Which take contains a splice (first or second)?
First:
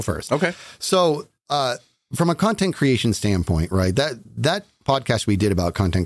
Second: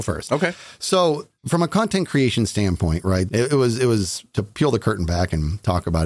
second